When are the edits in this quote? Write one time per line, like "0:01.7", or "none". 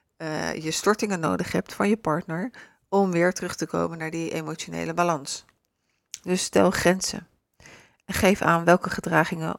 none